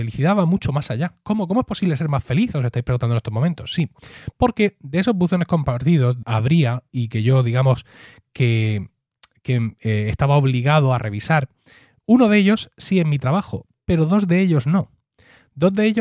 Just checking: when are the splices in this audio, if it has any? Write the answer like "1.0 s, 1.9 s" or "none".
6.2 s